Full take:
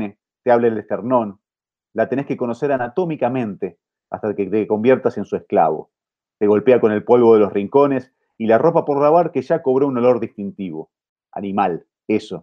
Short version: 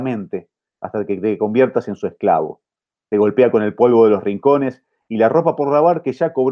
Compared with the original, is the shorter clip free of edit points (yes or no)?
yes